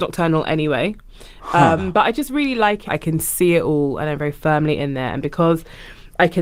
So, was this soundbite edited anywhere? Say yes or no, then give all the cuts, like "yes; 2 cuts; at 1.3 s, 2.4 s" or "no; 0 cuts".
yes; 2 cuts; at 1.8 s, 2.9 s